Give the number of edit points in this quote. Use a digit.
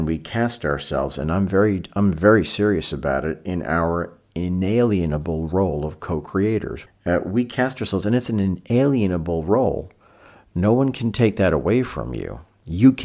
1